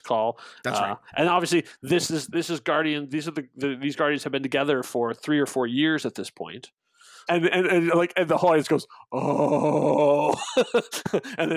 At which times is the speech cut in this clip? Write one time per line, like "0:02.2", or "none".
0:07.3

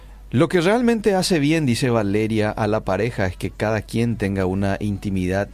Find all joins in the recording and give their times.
none

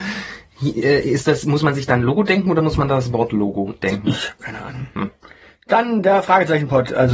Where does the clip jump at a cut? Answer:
none

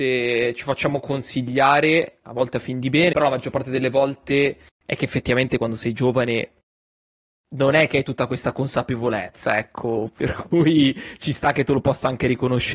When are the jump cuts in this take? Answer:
0:03.1

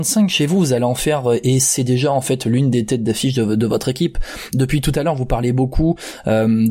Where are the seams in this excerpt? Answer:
none

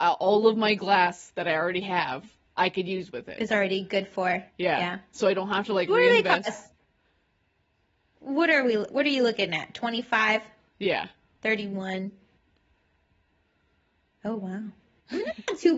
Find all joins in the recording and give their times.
none

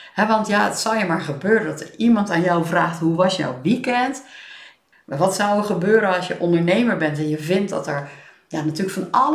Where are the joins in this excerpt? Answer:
0:04.9

